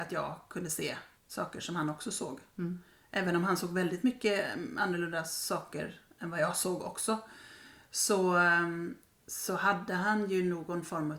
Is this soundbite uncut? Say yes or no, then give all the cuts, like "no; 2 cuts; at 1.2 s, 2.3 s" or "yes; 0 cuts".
no; 1 cut; at 1.2 s